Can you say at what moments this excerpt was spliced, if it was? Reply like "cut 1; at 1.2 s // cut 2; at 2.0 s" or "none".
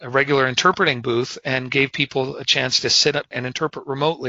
cut 1; at 3.3 s

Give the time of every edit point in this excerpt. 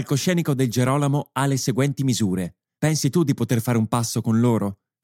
cut 1; at 2.8 s

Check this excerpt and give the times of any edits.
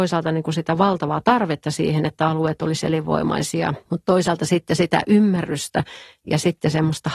cut 1; at 3.8 s

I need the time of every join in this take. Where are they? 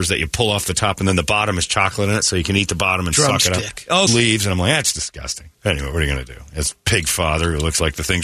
cut 1; at 4.1 s // cut 2; at 5.5 s

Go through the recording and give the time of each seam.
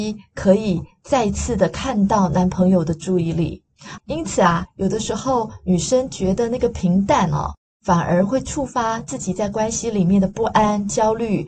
cut 1; at 4.0 s

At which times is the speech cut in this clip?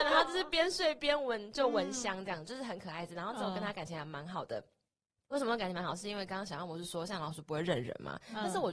none

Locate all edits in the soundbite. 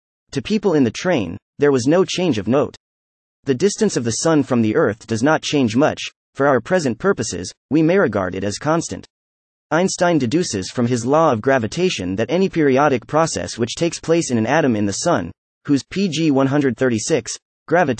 cut 1; at 3.3 s

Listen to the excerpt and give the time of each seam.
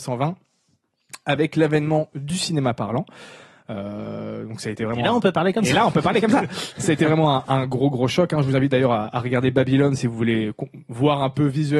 none

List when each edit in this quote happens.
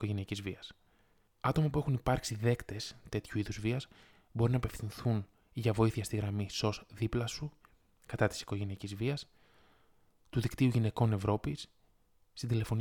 none

